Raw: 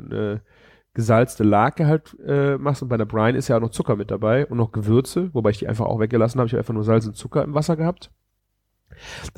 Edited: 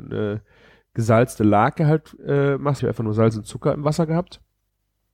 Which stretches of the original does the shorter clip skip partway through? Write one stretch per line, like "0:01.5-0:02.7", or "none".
0:02.8-0:06.5